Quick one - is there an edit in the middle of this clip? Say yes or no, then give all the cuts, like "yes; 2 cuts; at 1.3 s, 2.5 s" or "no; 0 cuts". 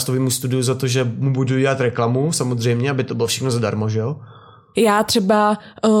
yes; 1 cut; at 4.7 s